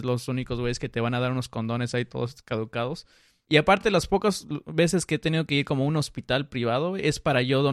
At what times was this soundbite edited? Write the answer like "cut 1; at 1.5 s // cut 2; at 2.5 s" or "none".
none